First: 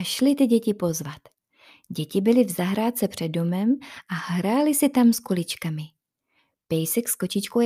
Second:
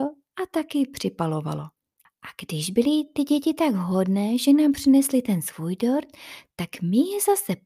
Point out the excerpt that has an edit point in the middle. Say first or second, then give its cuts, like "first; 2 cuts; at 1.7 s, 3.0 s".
second; 1 cut; at 2.1 s